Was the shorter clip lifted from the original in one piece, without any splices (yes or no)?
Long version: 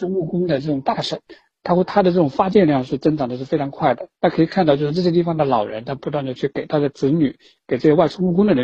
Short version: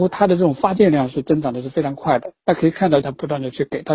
no